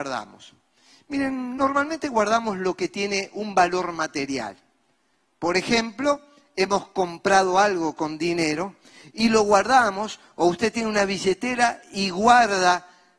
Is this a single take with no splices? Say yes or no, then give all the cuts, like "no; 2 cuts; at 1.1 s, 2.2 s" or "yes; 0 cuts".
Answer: yes; 0 cuts